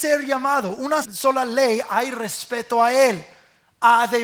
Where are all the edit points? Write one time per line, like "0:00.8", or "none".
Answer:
0:01.0